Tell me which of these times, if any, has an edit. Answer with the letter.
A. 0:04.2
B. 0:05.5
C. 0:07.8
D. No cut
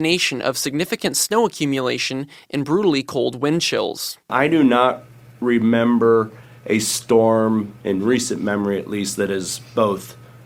C